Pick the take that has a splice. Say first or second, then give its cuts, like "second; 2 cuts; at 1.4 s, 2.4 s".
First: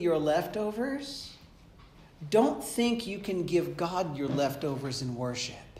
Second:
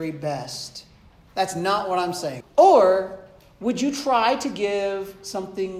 second; 2 cuts; at 1.3 s, 2.4 s